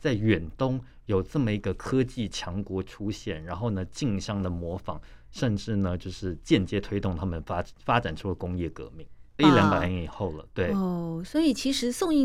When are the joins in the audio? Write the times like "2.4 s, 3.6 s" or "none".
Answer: 9.4 s